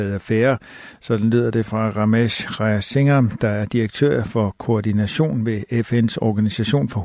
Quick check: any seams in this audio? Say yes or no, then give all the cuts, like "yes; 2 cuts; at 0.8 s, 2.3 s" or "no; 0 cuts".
no; 0 cuts